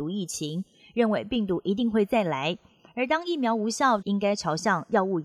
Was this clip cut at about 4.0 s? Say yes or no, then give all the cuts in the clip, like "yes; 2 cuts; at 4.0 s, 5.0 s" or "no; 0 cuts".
yes; 1 cut; at 4.0 s